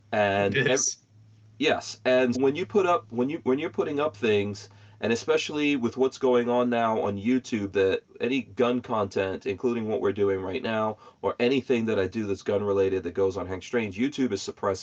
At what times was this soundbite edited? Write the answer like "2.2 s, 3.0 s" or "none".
2.3 s

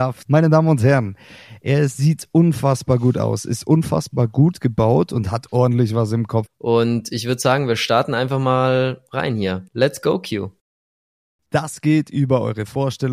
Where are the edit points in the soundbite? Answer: 6.5 s

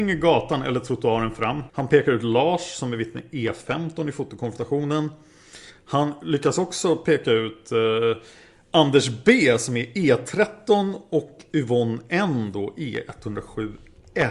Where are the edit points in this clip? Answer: 1.7 s

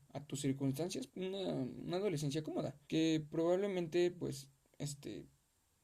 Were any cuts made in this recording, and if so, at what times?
1.1 s, 2.8 s

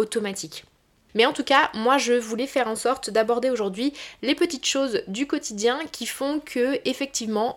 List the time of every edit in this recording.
1.1 s

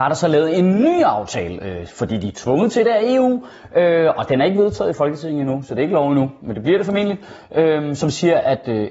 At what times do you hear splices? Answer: none

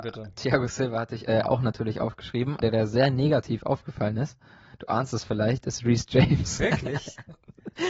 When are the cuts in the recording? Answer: 2.6 s, 6.6 s

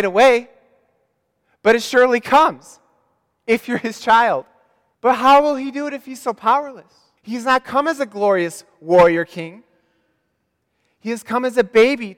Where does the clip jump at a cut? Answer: 4.9 s, 7.2 s

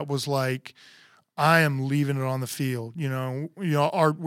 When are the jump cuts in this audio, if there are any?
none

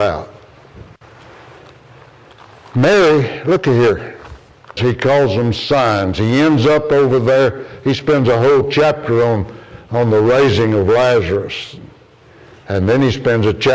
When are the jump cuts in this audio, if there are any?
4.8 s

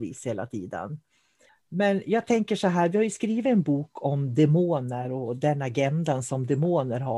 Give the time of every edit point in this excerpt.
1.5 s

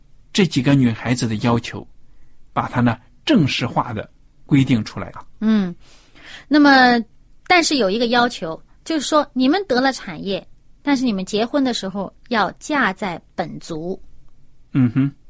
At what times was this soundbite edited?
5.2 s

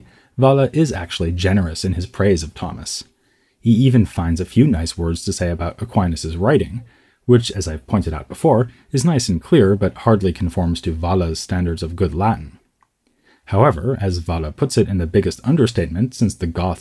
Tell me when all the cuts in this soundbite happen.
none

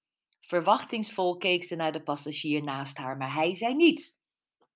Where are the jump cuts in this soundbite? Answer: none

